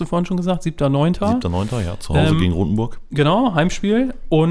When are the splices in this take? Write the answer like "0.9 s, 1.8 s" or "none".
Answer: none

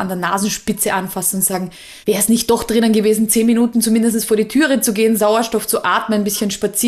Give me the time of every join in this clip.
2.0 s

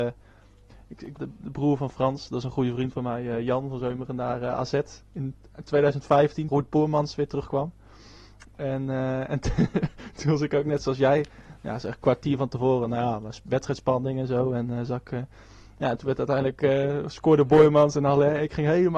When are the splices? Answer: 1.2 s, 6.5 s

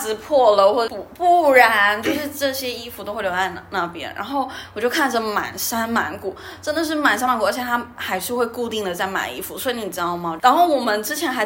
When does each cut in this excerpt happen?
10.4 s

